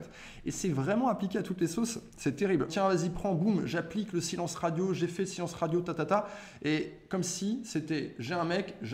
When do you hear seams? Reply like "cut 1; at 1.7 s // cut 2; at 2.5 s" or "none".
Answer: cut 1; at 2.7 s